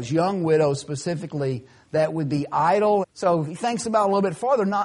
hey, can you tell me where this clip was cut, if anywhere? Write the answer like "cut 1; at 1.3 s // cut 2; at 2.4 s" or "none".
cut 1; at 3.0 s